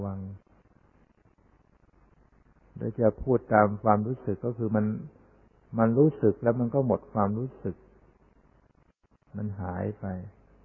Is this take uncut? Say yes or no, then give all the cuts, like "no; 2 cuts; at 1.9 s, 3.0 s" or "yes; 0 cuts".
yes; 0 cuts